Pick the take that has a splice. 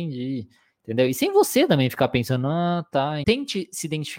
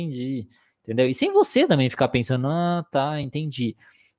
first; 1 cut; at 3.2 s

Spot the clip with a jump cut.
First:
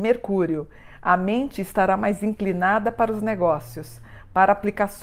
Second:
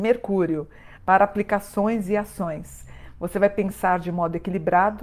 second; 1 cut; at 1.0 s

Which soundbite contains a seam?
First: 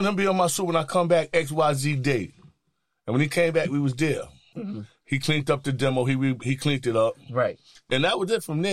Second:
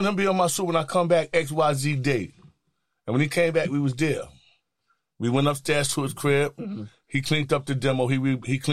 first; 1 cut; at 4.5 s

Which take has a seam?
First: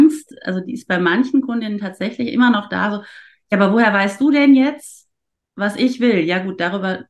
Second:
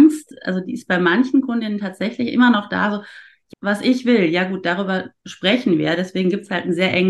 second; 1 cut; at 3.5 s

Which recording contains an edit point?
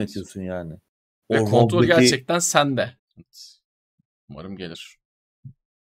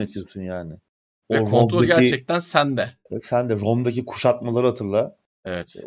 first; 1 cut; at 3.0 s

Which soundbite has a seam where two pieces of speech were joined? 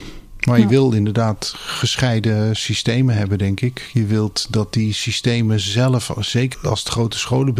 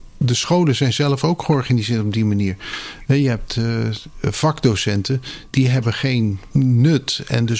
first; 1 cut; at 6.5 s

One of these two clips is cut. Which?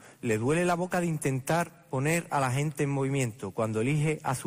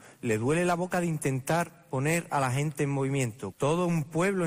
second; 1 cut; at 3.5 s

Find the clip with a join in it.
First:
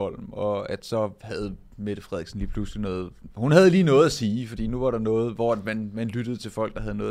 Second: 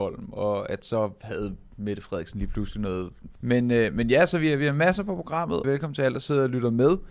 second; 2 cuts; at 3.4 s, 5.6 s

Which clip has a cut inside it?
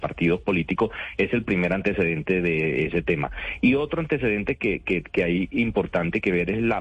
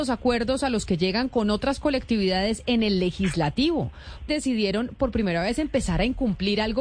second; 1 cut; at 4.3 s

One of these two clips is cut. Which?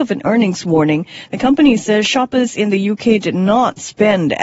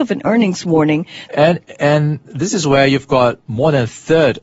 second; 1 cut; at 1.3 s

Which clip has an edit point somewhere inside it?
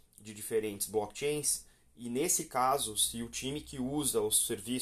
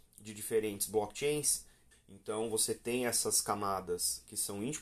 second; 1 cut; at 1.9 s

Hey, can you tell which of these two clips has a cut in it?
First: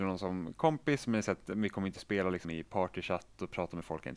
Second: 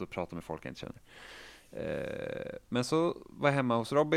first; 1 cut; at 2.4 s

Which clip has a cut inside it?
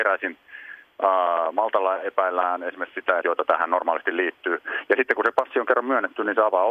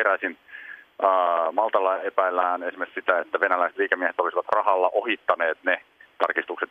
first; 1 cut; at 3.2 s

